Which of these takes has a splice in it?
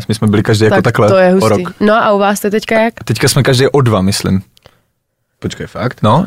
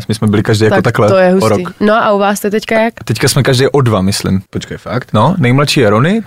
second; 1 cut; at 4.5 s

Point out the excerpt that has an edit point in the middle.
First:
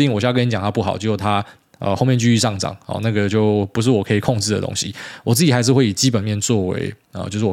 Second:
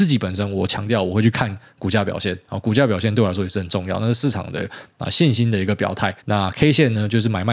second; 1 cut; at 6.2 s

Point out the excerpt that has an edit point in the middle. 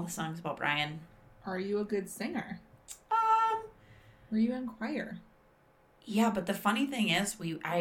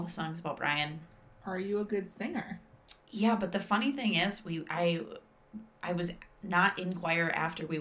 second; 1 cut; at 3.0 s

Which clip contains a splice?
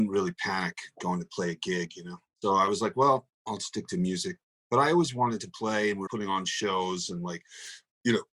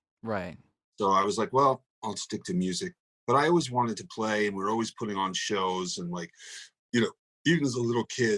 first; 2 cuts; at 2.3 s, 6.1 s

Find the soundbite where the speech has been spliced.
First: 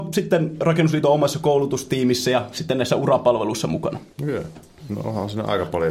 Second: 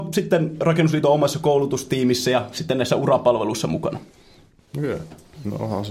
first; 1 cut; at 4.1 s

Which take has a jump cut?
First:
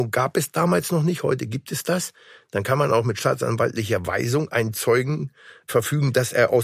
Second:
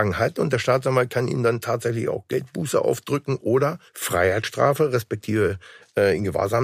second; 1 cut; at 3.9 s

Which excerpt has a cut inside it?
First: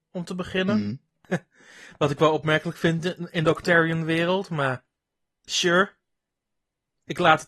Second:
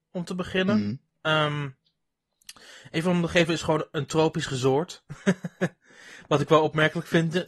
first; 1 cut; at 1.2 s

